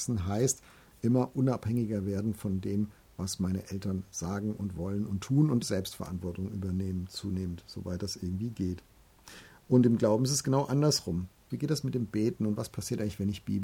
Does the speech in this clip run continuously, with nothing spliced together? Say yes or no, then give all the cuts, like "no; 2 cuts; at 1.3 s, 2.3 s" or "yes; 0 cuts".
no; 2 cuts; at 5.6 s, 11.5 s